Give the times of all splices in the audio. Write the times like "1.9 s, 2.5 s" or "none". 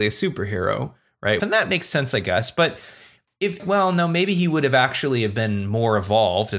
1.4 s, 3.6 s